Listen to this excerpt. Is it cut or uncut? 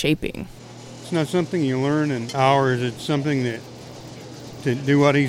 cut